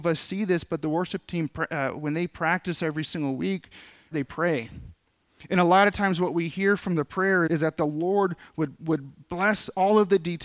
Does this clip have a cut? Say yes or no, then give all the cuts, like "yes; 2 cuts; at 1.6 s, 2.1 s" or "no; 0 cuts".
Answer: yes; 2 cuts; at 4.1 s, 7.5 s